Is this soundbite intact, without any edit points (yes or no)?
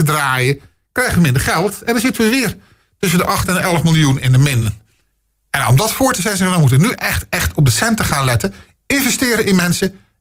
yes